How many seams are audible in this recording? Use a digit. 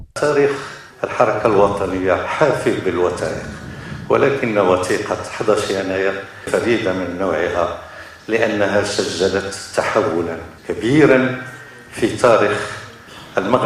1